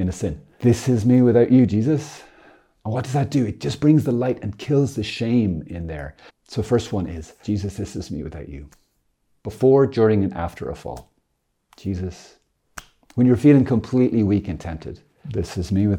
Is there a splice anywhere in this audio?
yes; 1 cut; at 6.3 s

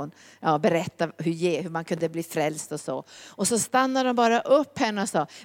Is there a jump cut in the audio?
no; 0 cuts

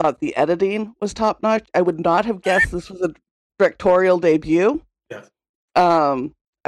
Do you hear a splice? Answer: no; 0 cuts

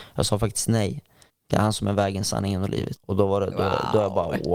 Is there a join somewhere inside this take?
yes; 2 cuts; at 1.3 s, 3.0 s

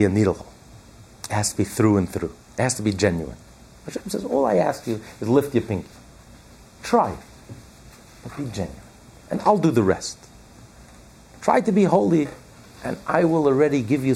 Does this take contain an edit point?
no; 0 cuts

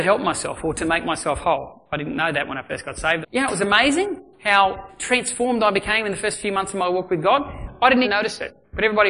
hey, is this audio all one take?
no; 2 cuts; at 3.2 s, 8.0 s

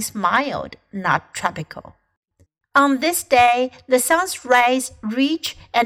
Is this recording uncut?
no; 1 cut; at 2.6 s

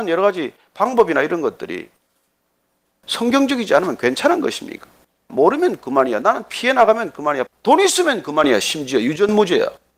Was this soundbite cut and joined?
yes; 2 cuts; at 5.3 s, 7.5 s

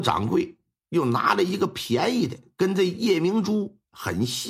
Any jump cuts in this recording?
no; 0 cuts

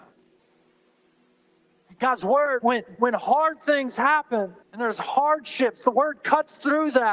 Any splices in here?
yes; 2 cuts; at 2.6 s, 4.6 s

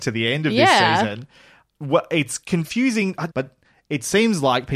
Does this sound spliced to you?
yes; 1 cut; at 3.3 s

